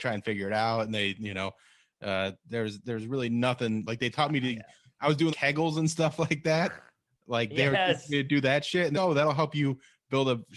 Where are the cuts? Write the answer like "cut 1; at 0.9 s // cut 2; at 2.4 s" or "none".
cut 1; at 3.8 s // cut 2; at 5.3 s // cut 3; at 8.9 s